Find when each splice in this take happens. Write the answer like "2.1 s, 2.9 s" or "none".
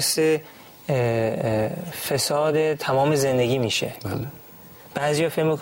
none

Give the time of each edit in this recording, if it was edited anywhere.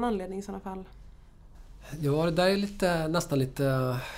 none

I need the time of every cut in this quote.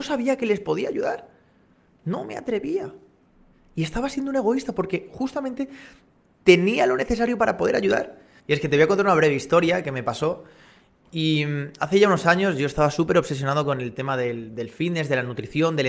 8.4 s

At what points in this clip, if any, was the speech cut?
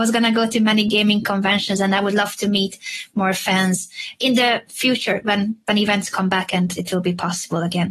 none

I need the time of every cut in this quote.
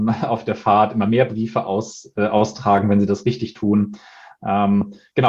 none

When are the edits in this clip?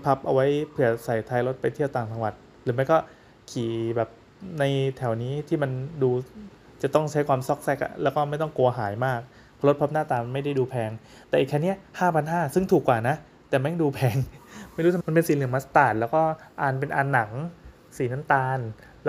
15.0 s

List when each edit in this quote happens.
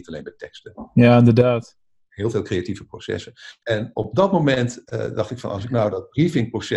3.6 s

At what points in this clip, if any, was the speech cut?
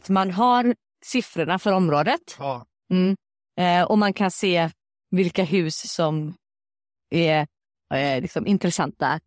none

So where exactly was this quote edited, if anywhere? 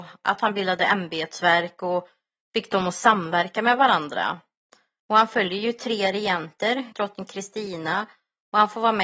5.0 s, 6.9 s

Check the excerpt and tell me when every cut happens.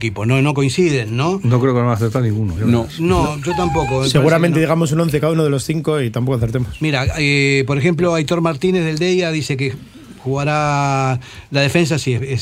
none

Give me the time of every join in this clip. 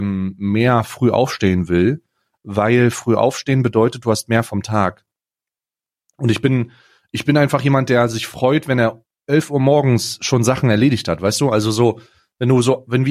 none

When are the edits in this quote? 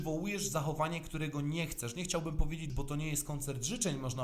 2.7 s

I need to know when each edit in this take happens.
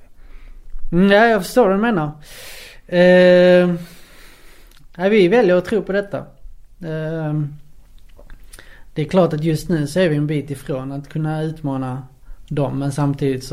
none

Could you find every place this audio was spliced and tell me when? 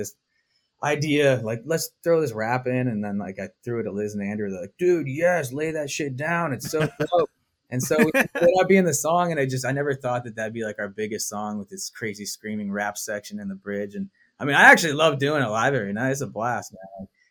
none

